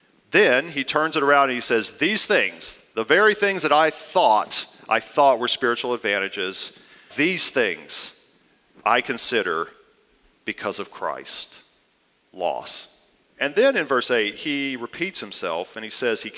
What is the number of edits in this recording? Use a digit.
2